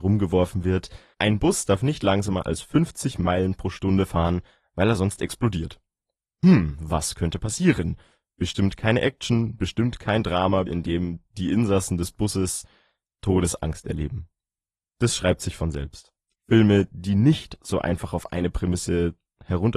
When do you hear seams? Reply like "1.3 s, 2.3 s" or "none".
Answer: 1.1 s, 10.7 s, 16.3 s